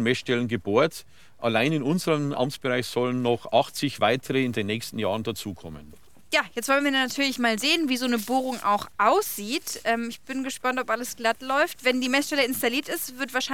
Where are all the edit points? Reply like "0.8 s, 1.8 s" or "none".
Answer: none